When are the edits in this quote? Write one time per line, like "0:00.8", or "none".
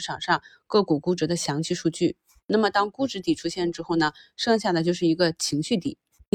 none